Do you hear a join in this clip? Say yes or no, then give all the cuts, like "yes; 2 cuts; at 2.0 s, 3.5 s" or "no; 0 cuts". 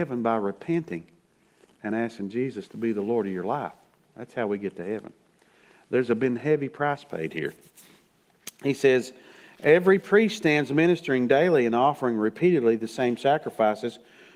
no; 0 cuts